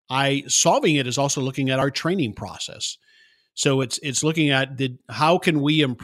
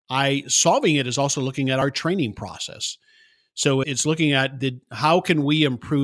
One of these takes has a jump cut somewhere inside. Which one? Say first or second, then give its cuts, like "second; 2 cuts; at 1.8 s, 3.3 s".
second; 1 cut; at 3.8 s